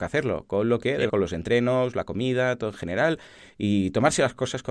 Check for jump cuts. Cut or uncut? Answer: cut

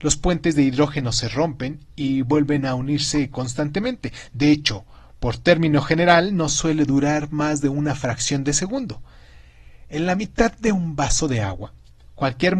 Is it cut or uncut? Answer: uncut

